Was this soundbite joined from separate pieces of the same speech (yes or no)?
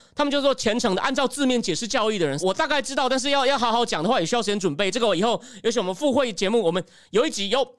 yes